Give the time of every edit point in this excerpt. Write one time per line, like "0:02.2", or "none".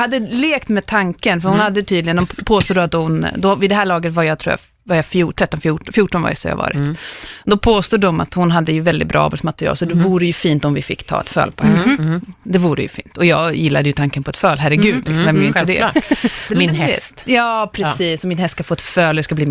none